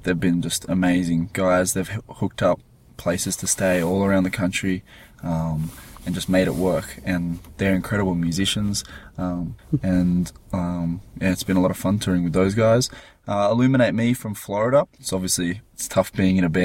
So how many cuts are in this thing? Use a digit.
2